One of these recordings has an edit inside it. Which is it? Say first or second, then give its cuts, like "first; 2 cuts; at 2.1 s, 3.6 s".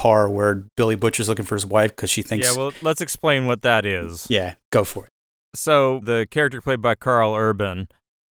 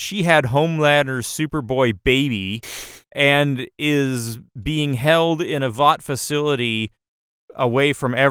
first; 2 cuts; at 4.6 s, 6.0 s